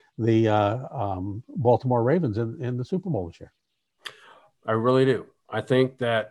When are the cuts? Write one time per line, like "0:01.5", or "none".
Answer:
0:04.5